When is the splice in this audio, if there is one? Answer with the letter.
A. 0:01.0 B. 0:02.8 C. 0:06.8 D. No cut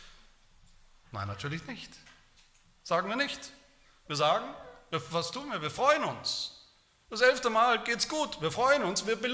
A